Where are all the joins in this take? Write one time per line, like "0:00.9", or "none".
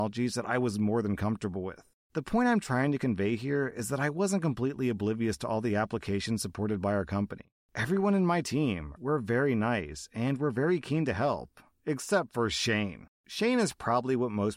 0:09.0